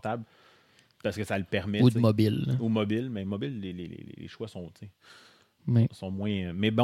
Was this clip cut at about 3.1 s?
no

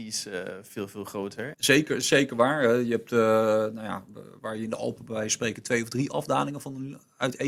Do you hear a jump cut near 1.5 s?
yes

